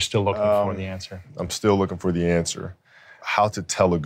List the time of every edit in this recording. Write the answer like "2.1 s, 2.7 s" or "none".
none